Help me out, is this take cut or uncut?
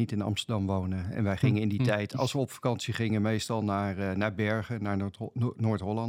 uncut